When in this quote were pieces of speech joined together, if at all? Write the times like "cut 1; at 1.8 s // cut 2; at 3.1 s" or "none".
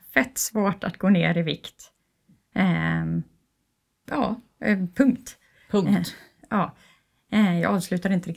none